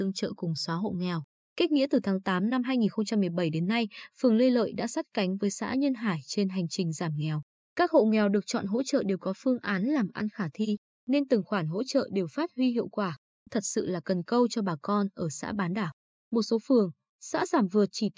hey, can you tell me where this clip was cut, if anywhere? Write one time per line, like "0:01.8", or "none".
0:16.1